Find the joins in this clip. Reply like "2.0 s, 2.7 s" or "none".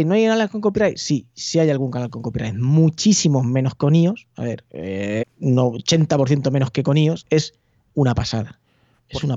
5.2 s, 7.2 s